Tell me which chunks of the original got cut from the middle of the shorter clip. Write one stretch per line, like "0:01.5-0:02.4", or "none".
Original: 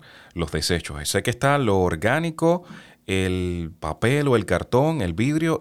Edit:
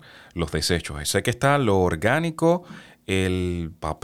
none

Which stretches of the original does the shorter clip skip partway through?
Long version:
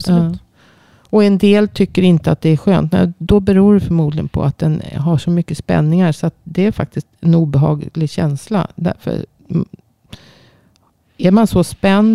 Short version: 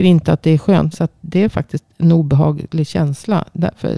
0:02.9-0:06.1

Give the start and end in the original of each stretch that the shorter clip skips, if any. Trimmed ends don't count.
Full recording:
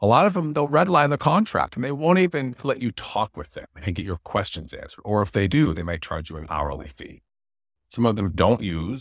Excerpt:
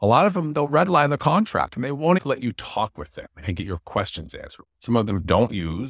0:02.2-0:02.6
0:05.0-0:07.7

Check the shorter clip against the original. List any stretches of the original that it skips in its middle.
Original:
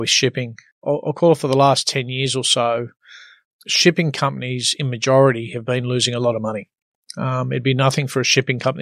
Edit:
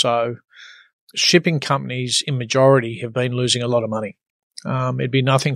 none

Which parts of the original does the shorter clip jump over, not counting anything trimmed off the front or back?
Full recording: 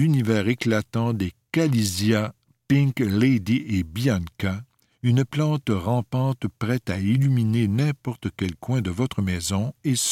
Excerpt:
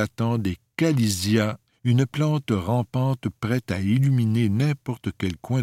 0:02.4-0:04.9

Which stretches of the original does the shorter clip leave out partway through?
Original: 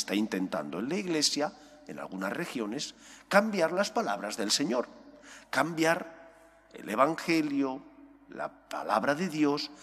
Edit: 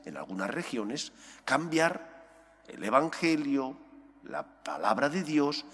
0:03.3-0:05.5

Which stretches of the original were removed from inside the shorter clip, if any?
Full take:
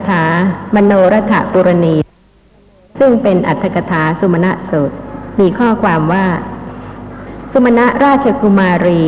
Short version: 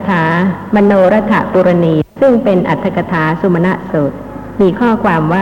0:02.1-0:02.9

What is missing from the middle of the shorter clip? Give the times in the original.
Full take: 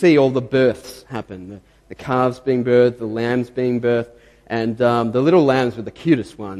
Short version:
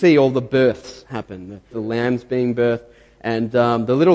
0:01.7-0:03.0

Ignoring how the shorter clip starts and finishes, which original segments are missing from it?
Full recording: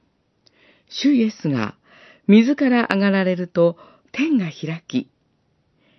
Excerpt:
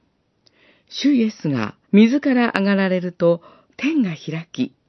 0:01.8-0:02.2

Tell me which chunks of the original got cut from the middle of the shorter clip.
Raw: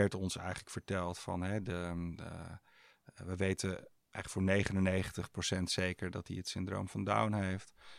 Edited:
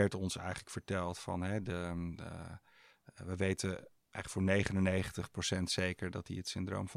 none

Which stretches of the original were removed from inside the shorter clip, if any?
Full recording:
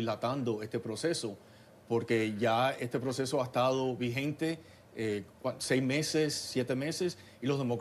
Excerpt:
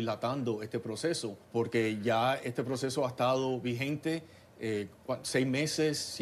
0:01.4-0:01.8

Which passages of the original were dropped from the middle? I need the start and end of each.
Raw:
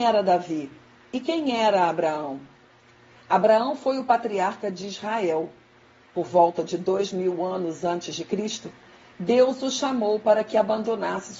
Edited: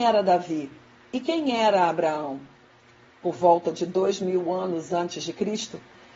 0:03.1-0:06.0

